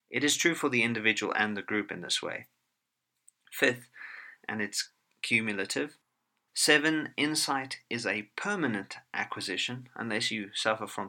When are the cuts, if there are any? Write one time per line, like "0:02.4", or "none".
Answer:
0:04.4
0:06.5